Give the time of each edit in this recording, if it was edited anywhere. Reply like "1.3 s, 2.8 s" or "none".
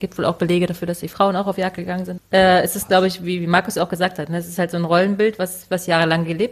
2.2 s